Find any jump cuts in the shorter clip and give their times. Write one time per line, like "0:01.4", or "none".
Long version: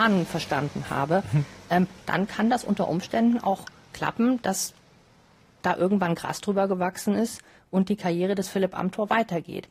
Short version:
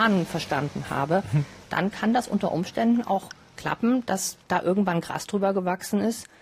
0:01.6
0:04.4